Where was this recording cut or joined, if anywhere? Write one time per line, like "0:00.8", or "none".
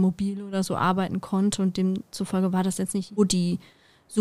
0:03.2